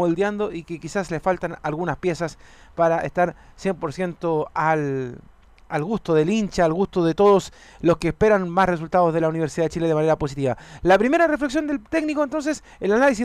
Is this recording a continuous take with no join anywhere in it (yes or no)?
yes